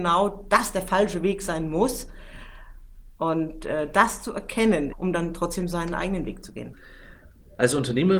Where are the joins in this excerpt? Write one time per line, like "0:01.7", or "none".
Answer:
0:03.1
0:04.9